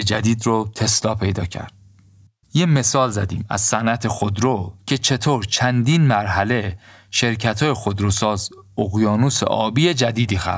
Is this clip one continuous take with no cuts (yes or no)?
no